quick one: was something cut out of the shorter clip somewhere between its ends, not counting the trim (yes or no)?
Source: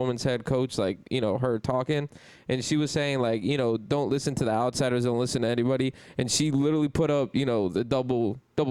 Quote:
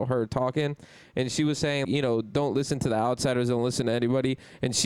yes